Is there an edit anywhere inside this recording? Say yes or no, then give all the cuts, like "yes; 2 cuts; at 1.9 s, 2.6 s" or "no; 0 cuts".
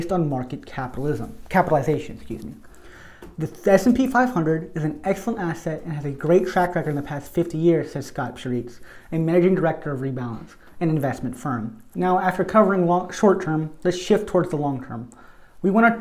yes; 1 cut; at 11.9 s